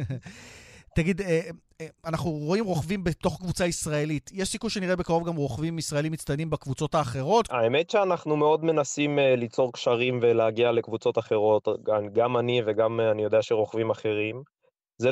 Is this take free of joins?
no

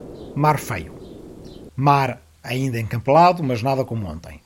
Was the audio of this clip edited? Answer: yes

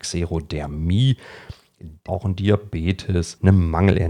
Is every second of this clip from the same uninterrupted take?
no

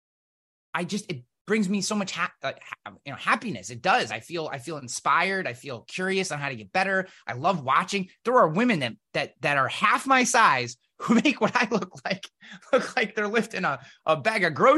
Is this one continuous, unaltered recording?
yes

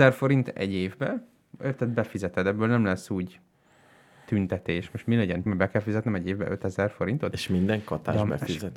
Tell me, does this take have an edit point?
yes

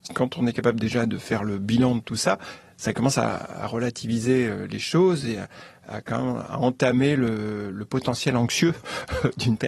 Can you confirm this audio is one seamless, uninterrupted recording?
yes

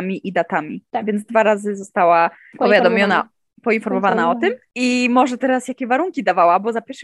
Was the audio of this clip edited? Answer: no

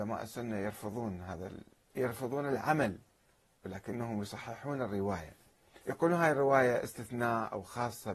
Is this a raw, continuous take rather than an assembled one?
no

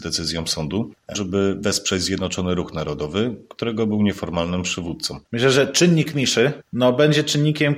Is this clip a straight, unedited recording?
no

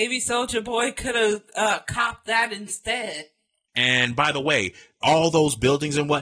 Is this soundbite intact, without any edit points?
no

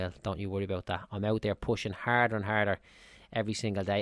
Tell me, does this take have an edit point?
no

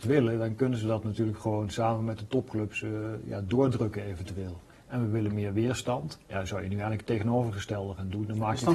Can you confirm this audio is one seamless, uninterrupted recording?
no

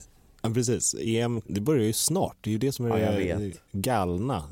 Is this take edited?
yes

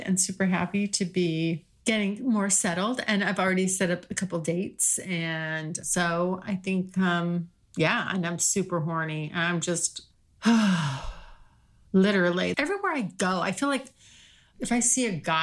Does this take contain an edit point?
yes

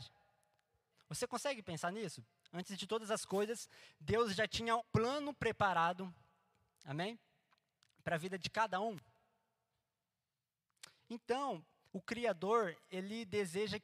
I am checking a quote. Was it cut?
yes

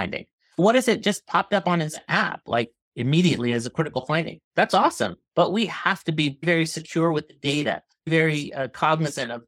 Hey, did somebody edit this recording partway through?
no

